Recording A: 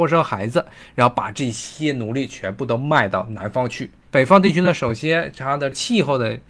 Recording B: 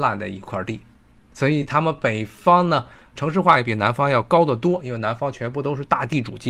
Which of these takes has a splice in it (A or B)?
A